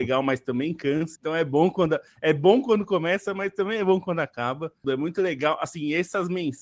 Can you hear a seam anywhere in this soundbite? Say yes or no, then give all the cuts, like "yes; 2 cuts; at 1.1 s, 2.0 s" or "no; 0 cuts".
yes; 2 cuts; at 1.2 s, 4.8 s